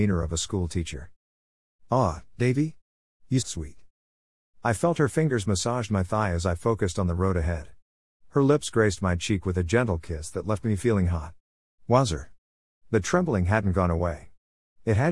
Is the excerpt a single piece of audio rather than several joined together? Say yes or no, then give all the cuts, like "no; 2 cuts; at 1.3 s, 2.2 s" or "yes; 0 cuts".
no; 2 cuts; at 3.4 s, 12.7 s